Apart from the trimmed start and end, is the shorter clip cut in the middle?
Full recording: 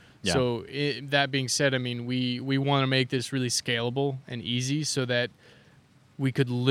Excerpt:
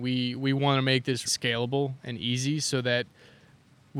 yes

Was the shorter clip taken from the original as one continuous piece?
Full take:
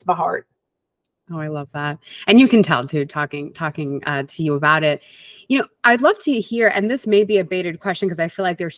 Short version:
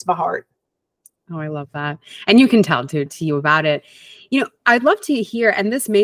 no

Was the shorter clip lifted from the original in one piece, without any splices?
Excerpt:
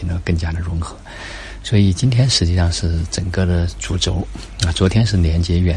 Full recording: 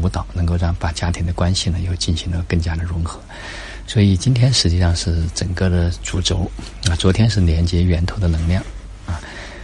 yes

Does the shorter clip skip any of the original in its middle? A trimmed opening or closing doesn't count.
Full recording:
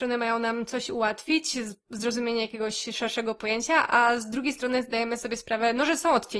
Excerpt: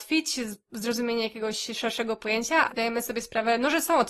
yes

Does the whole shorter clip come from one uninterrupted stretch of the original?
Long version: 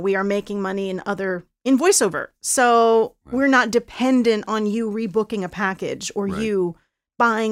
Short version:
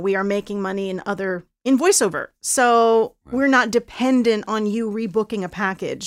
yes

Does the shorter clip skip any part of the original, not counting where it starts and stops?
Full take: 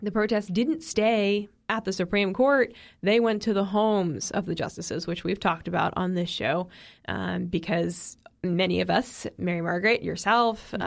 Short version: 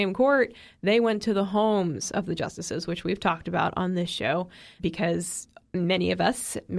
yes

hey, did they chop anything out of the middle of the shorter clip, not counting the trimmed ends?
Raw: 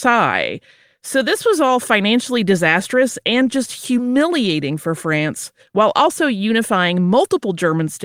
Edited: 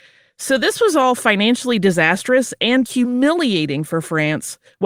yes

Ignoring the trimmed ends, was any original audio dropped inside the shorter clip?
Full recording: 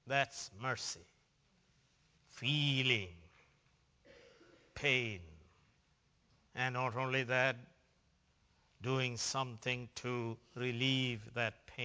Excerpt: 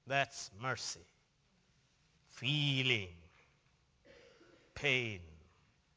no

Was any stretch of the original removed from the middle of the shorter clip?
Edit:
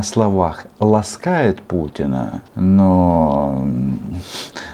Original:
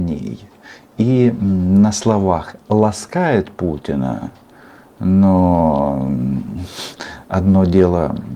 yes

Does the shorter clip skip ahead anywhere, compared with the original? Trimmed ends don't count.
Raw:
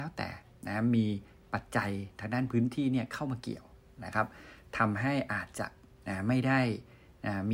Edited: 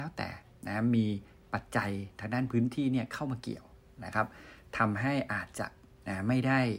no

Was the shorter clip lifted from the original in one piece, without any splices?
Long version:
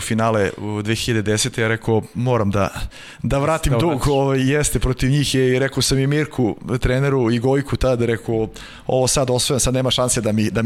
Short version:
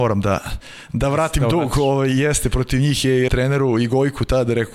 no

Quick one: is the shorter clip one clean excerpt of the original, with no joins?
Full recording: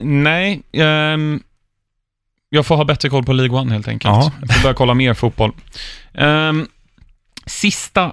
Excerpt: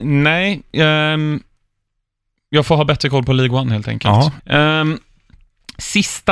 no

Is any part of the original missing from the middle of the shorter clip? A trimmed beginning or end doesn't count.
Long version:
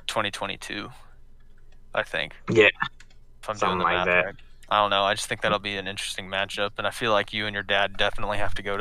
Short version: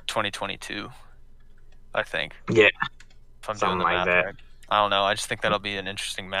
no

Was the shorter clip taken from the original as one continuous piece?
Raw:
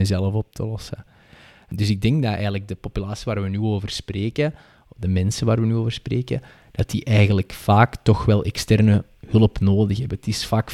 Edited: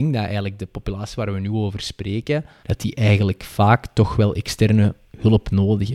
no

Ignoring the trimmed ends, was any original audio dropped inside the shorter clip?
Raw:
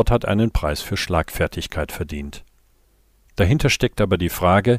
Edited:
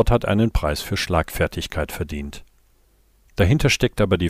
no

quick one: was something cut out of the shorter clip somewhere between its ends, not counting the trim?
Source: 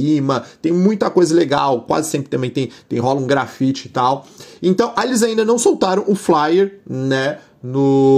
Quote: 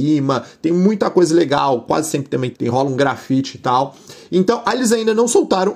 yes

